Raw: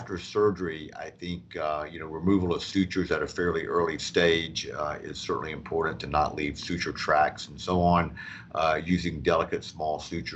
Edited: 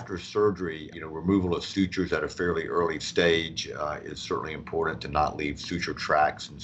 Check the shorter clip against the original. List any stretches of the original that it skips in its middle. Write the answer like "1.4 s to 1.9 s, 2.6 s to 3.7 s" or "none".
0.9 s to 1.9 s